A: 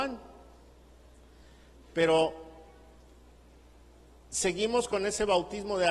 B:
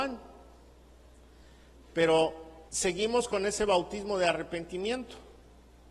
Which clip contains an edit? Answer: B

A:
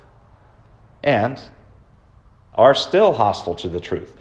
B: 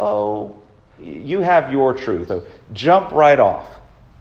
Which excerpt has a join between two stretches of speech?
B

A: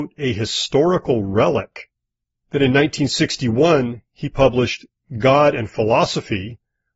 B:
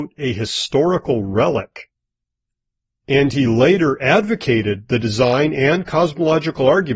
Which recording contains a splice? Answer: A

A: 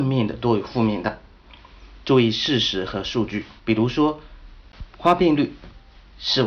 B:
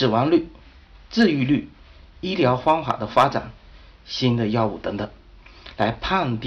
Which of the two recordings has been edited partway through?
A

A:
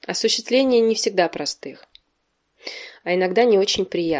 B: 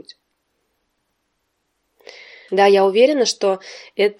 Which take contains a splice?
B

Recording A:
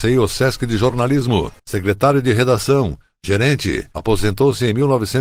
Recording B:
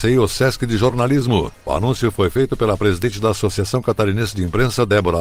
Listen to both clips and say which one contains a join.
A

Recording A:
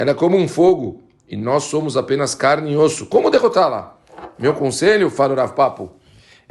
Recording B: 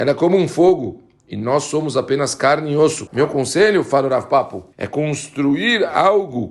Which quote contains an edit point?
B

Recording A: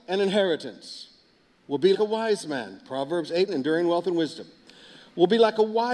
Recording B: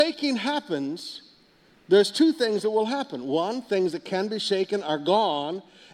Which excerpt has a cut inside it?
A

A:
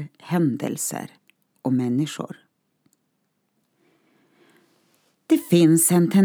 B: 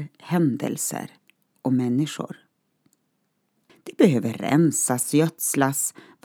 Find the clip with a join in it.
B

